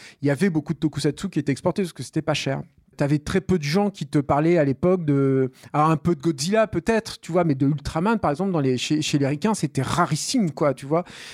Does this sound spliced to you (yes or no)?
yes